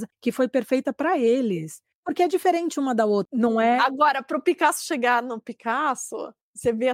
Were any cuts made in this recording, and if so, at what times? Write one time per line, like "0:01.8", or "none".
0:03.3